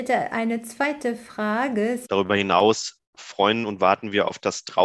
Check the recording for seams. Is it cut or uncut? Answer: cut